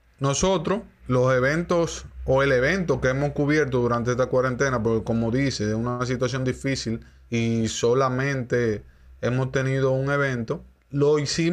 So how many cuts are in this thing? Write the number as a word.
zero